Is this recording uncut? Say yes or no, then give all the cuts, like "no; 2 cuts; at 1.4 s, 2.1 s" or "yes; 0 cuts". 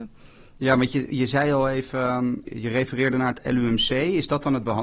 no; 1 cut; at 2.4 s